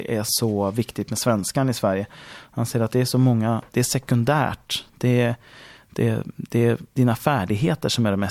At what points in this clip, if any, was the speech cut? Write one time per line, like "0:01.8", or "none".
0:03.7